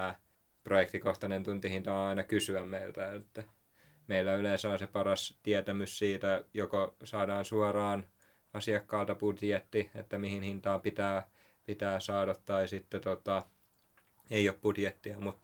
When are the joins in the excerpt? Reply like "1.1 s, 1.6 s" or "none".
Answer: none